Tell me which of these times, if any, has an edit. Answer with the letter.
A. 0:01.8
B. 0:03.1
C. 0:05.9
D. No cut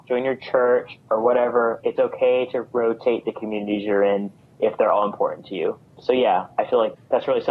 A